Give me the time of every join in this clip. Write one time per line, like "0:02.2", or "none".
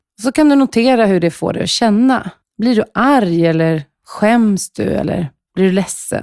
none